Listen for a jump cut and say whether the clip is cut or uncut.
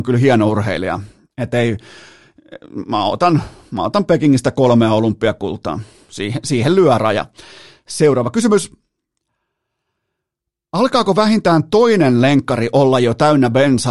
uncut